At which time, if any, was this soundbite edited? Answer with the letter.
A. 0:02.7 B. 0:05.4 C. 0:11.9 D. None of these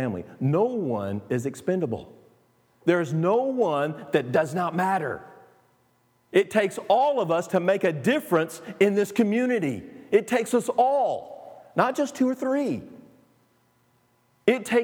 D